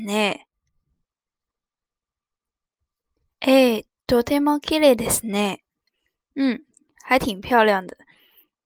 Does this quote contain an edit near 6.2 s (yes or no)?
no